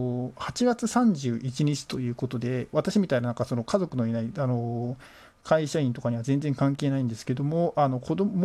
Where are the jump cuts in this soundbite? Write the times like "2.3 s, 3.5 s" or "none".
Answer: 2.7 s